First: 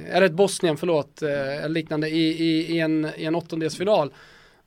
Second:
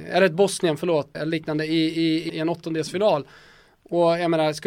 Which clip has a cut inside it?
second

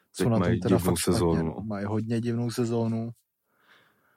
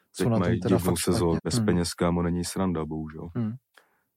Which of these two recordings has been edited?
second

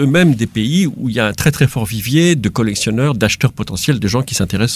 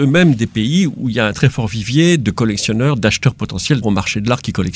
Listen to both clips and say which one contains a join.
second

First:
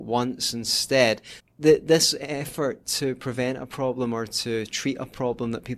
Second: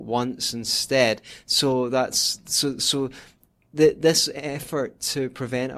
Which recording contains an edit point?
first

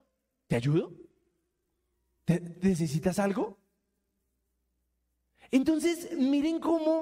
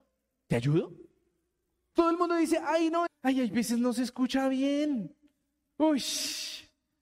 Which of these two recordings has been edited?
second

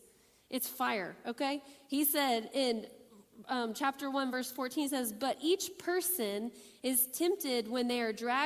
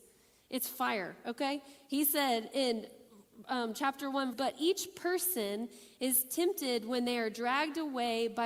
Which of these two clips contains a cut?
second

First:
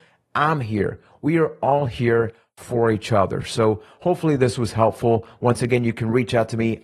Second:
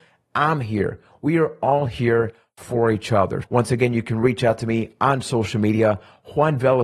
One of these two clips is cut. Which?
second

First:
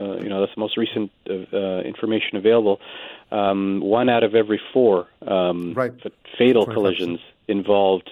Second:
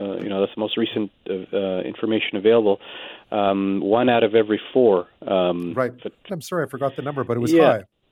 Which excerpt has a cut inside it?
second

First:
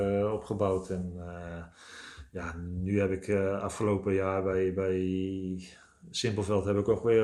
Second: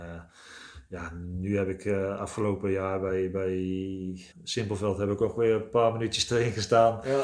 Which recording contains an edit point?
second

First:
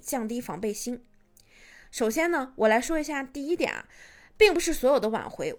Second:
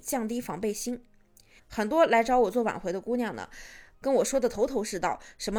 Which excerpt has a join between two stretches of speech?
second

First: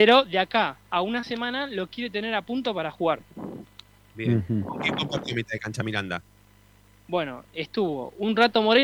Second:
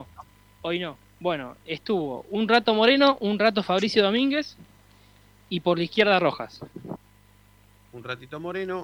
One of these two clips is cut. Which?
second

